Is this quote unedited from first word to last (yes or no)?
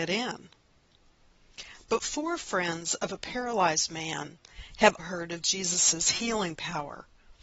no